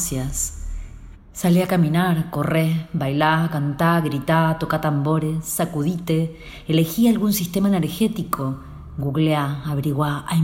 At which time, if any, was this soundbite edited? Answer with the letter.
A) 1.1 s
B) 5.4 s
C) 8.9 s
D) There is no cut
A